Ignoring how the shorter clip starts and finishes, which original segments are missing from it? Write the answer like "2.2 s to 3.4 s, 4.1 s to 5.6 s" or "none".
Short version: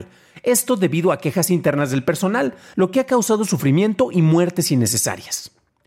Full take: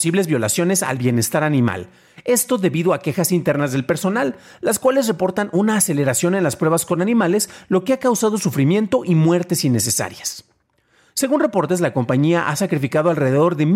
4.5 s to 7.7 s